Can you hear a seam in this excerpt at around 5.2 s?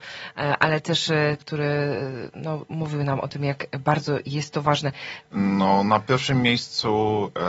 yes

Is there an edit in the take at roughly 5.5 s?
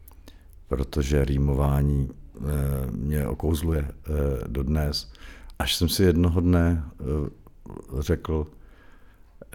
yes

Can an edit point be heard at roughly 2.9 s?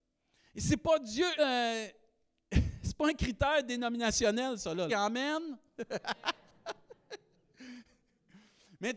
no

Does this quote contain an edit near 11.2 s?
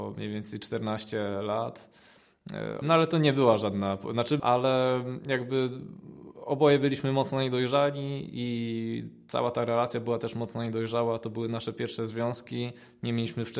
no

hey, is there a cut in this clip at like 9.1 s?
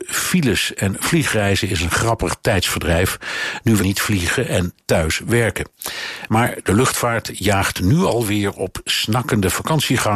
no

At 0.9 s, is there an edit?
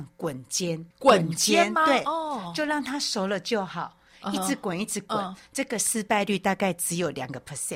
yes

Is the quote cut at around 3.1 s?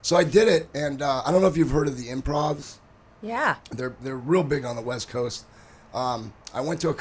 no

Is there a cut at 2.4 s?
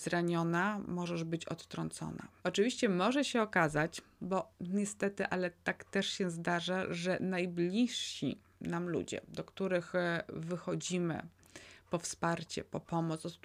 yes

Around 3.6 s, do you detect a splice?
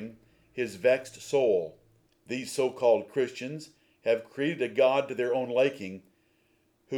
no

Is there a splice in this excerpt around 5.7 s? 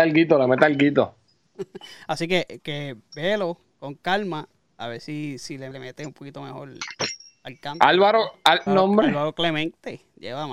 yes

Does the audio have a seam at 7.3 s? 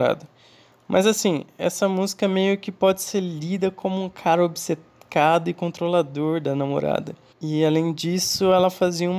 yes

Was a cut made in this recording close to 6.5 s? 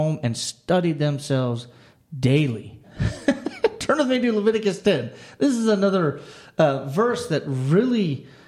no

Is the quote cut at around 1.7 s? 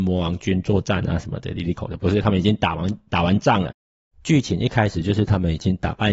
yes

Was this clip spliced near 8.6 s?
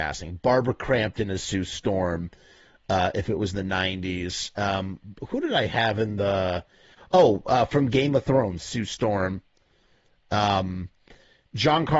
yes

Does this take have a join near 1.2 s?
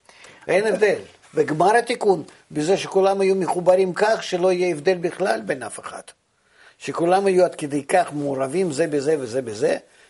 yes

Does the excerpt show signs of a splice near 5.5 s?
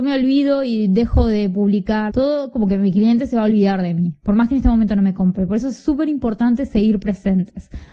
no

